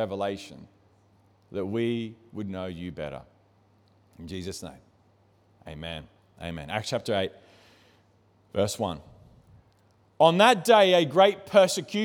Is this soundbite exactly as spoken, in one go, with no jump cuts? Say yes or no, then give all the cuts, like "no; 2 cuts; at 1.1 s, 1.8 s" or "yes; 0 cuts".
yes; 0 cuts